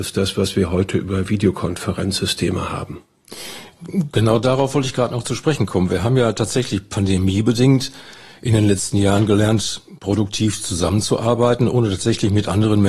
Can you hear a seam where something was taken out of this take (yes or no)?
no